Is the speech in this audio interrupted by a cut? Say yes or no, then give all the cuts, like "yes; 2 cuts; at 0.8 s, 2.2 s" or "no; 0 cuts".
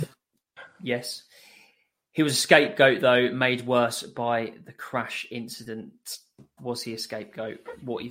yes; 1 cut; at 6.6 s